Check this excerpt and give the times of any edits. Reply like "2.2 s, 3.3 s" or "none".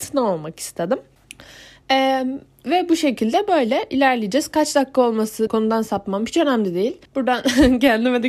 5.5 s, 7.1 s